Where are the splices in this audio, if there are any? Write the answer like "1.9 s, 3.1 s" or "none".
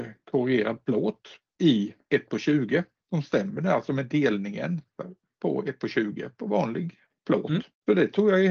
none